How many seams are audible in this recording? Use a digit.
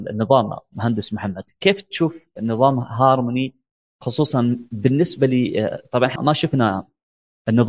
1